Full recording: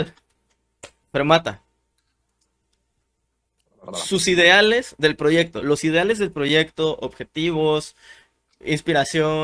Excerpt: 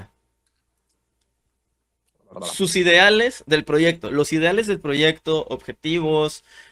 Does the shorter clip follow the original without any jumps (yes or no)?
yes